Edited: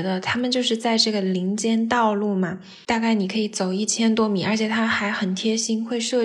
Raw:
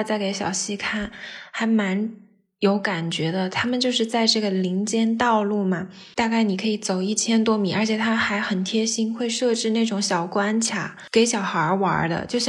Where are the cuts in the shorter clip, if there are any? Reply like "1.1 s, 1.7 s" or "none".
none